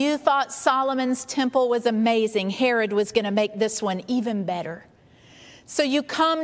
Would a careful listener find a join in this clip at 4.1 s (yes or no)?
no